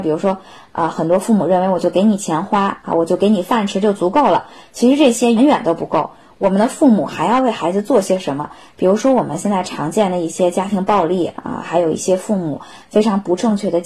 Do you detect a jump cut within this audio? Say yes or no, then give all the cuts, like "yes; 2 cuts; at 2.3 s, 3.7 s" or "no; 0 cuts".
yes; 2 cuts; at 5.4 s, 8.7 s